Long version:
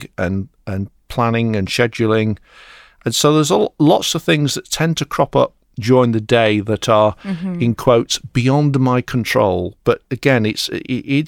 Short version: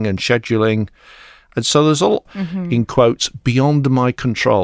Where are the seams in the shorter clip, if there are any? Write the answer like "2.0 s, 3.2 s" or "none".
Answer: 2.3 s